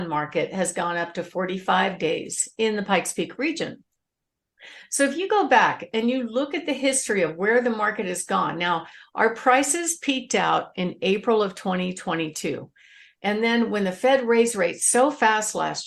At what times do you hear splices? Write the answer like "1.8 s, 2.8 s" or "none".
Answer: none